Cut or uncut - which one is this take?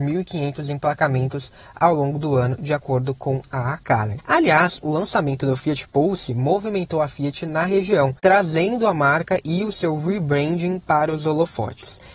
cut